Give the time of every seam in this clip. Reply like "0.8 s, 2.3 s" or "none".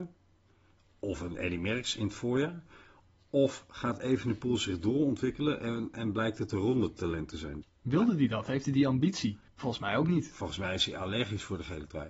7.6 s, 9.5 s